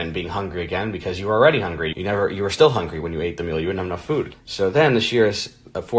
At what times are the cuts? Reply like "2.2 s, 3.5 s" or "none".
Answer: 1.9 s, 4.3 s